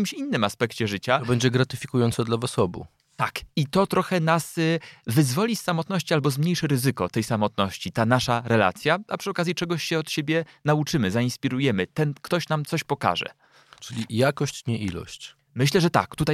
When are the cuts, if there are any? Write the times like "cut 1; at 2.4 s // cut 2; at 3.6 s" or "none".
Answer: none